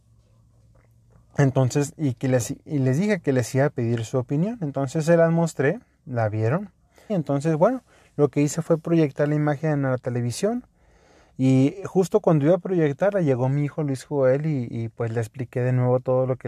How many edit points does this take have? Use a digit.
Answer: 1